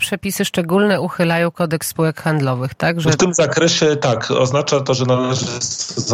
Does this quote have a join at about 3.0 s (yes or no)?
no